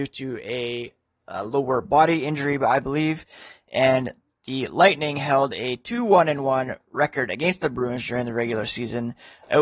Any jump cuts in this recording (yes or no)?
no